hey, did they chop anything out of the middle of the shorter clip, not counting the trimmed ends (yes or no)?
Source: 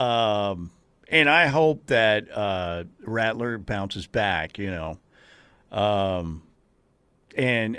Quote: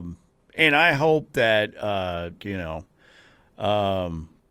yes